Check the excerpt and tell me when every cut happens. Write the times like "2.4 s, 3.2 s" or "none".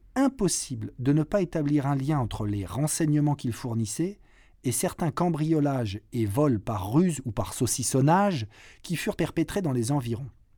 9.2 s